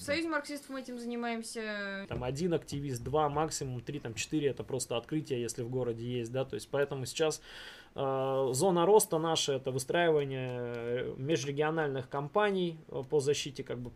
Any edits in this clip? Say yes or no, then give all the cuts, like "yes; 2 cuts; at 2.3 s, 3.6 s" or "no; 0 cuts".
yes; 1 cut; at 2.0 s